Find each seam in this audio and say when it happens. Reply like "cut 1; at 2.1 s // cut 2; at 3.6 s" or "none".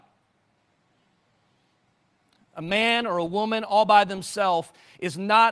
none